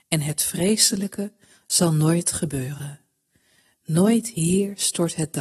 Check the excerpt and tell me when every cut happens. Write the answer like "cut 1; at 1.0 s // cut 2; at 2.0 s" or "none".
none